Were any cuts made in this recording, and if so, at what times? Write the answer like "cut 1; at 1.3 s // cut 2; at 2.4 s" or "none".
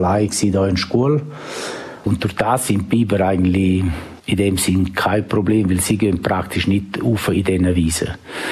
cut 1; at 2.0 s